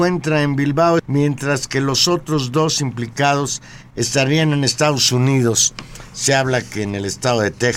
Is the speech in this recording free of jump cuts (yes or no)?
no